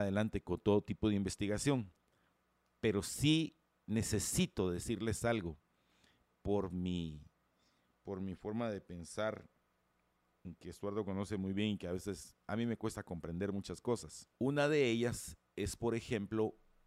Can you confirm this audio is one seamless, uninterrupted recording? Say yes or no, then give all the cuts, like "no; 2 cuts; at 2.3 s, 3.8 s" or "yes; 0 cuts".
no; 1 cut; at 14.3 s